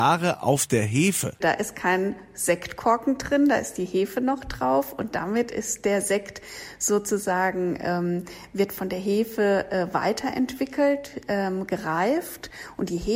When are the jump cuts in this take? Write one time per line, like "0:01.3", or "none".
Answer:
0:01.4